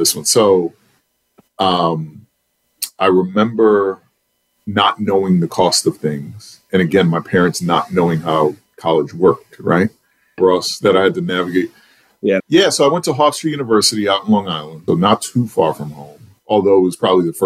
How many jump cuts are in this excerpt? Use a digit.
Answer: 3